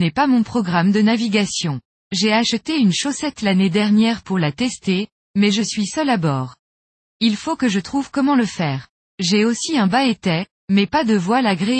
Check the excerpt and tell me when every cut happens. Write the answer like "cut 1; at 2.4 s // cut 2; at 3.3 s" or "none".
cut 1; at 1.9 s